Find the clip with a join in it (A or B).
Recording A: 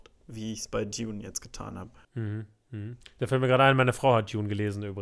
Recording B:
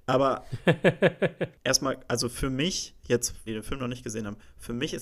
B